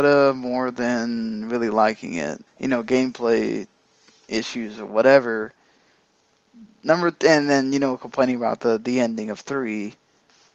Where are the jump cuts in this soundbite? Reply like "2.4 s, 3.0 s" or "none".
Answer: 2.5 s